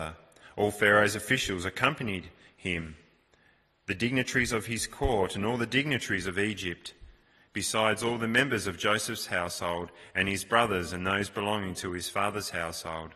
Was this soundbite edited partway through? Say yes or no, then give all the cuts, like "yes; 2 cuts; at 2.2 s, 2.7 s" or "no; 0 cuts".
no; 0 cuts